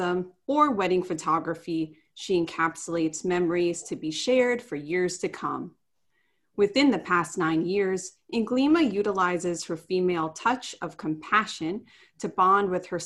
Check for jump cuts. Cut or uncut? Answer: uncut